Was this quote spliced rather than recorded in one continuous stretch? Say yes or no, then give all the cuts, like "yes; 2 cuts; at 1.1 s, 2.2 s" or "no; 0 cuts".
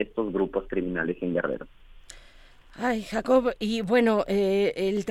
no; 0 cuts